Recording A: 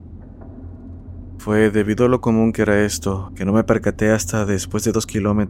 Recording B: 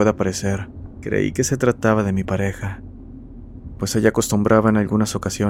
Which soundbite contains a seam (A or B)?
A